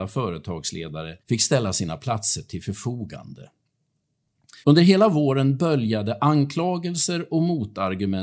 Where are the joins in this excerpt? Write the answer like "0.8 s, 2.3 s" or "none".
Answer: 1.2 s, 4.6 s